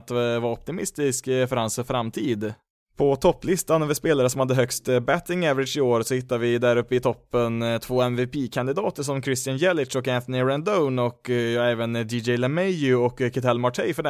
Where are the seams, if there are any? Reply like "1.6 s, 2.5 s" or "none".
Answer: none